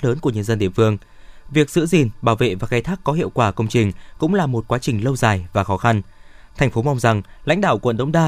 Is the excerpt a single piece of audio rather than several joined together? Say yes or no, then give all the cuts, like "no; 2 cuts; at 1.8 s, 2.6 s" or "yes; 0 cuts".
yes; 0 cuts